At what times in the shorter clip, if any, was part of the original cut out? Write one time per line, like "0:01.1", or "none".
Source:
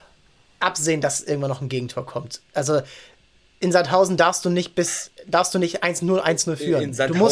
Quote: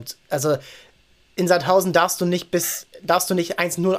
none